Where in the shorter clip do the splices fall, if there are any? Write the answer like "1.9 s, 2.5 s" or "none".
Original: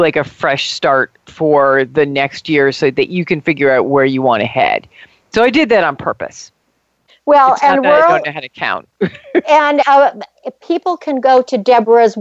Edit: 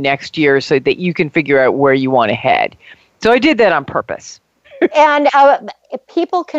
4.6 s

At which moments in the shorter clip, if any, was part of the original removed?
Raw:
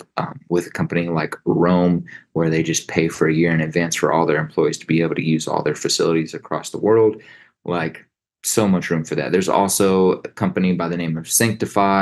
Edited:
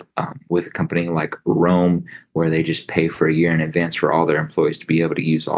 none

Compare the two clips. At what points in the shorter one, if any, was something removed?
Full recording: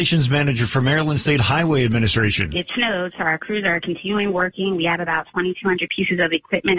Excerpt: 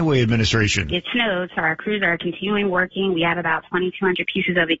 none

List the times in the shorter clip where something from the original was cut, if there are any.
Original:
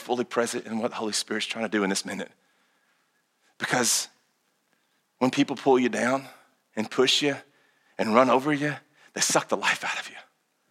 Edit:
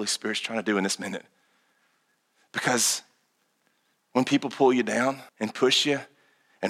5.3 s

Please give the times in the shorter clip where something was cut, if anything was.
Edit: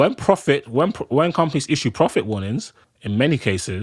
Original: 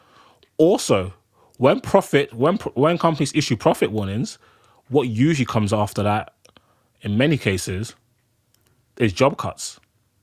2.8 s

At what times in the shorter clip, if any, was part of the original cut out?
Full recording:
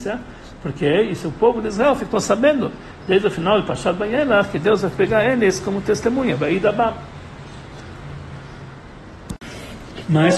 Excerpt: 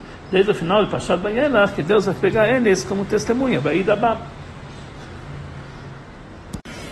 none

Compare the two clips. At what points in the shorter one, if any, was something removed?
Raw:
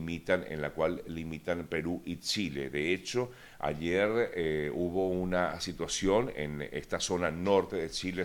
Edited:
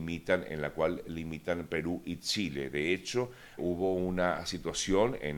3.6 s

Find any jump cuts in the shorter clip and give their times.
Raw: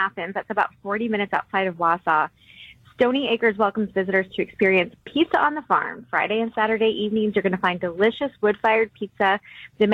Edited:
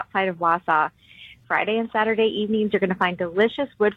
1.4 s

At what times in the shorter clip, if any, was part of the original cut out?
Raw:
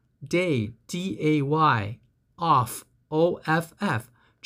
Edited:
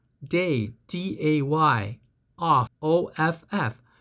2.7 s

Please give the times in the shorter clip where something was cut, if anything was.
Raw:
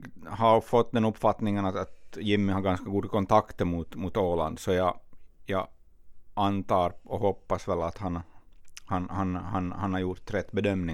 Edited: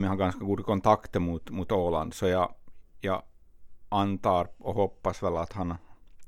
none

